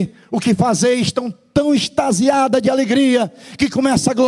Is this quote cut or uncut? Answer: uncut